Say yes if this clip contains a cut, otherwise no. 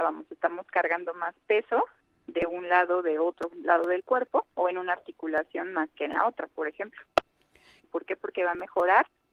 yes